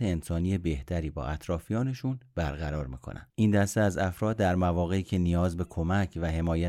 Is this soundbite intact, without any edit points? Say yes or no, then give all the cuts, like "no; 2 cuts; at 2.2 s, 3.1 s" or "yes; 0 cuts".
no; 1 cut; at 3.3 s